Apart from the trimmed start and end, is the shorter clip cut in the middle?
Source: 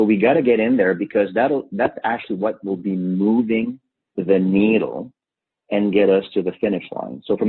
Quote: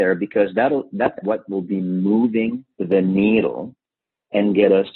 yes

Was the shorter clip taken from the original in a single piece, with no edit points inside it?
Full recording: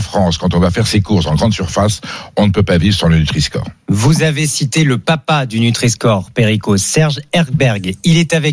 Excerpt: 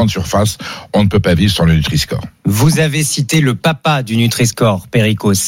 yes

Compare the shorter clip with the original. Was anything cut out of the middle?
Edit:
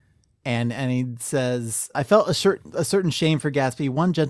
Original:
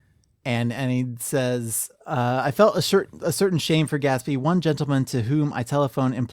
yes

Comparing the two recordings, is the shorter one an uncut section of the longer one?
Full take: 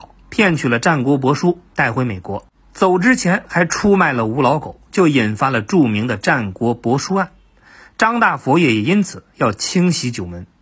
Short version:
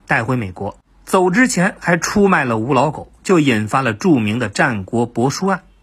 yes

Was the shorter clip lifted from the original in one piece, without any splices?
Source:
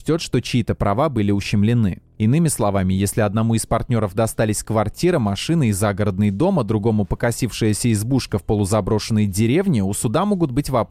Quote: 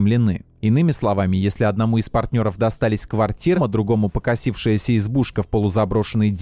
no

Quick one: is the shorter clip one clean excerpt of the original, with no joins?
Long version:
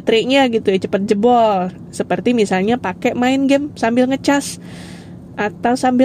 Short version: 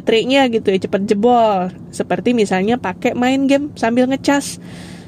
yes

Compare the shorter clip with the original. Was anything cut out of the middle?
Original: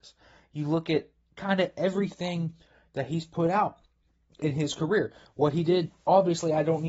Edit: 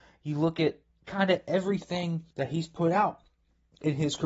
yes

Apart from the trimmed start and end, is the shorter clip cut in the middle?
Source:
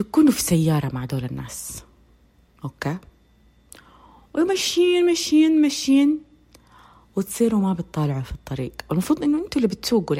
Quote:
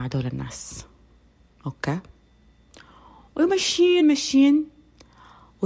yes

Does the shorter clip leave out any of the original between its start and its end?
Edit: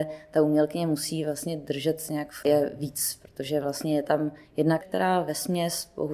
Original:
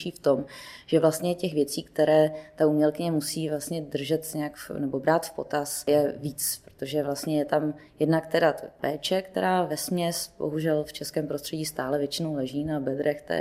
yes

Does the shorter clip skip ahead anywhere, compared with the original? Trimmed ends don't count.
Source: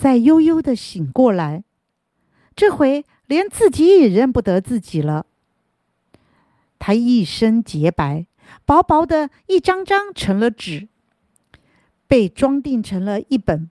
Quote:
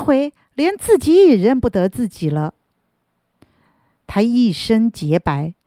no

